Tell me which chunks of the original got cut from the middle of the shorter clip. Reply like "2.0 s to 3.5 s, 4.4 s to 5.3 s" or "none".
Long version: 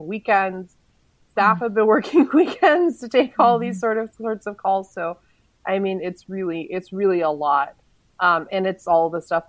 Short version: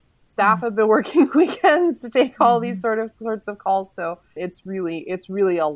5.4 s to 6.0 s